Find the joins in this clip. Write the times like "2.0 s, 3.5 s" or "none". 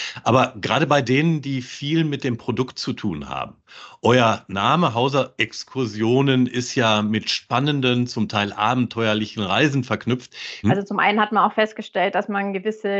10.6 s